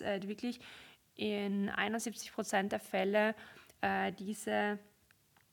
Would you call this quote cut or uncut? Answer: uncut